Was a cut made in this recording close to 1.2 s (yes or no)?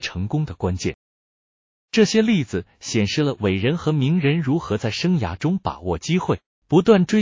no